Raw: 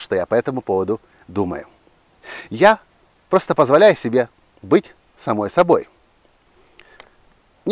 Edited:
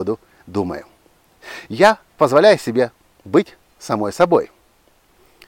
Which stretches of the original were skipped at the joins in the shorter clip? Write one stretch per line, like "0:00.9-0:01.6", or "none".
0:03.0-0:03.6